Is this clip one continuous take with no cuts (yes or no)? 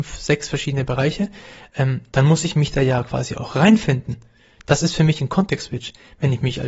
yes